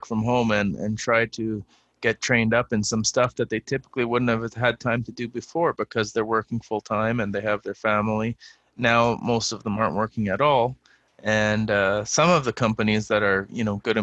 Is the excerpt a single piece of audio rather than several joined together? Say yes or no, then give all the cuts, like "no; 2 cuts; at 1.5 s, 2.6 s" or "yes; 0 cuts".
yes; 0 cuts